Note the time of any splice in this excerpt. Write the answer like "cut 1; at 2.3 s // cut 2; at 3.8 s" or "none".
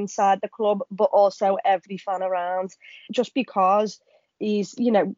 cut 1; at 3.1 s